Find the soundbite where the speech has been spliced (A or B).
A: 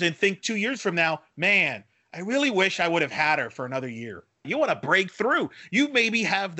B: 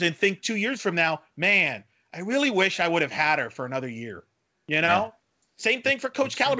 A